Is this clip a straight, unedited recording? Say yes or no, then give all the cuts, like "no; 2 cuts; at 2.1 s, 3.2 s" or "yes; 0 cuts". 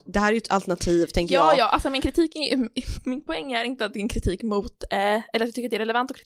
yes; 0 cuts